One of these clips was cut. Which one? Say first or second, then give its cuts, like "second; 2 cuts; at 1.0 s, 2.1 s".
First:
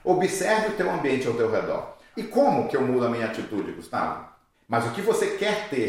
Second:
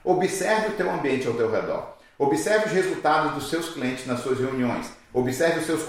first; 2 cuts; at 2.1 s, 4.5 s